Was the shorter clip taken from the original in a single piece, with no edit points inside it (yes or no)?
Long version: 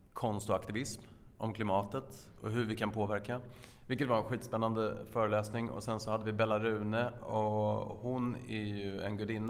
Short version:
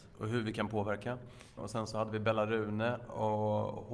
no